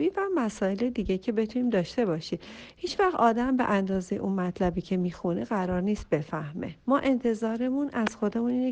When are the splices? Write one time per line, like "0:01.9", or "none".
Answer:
0:06.8